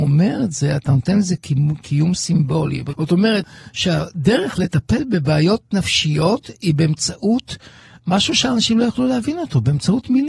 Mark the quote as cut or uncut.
cut